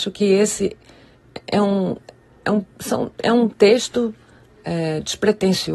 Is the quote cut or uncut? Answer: uncut